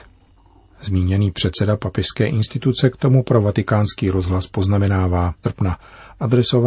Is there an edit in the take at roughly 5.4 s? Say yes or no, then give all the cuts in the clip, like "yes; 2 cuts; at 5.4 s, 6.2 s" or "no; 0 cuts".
yes; 1 cut; at 5.4 s